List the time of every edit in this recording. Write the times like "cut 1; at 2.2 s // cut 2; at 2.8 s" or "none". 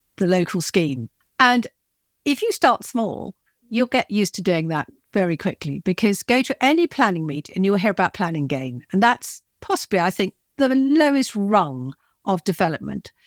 cut 1; at 1.2 s